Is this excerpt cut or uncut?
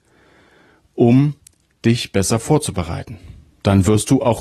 uncut